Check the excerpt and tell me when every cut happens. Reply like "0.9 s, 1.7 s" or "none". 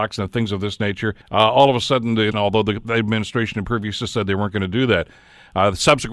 1.2 s, 2.3 s